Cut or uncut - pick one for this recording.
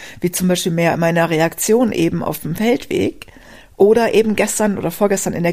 uncut